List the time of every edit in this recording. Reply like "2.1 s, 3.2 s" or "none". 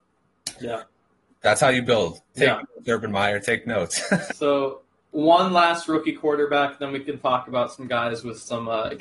2.3 s, 4.3 s